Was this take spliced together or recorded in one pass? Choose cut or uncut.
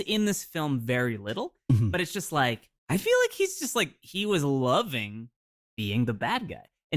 cut